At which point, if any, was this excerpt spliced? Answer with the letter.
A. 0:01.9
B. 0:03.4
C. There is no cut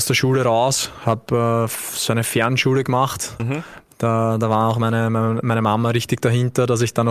B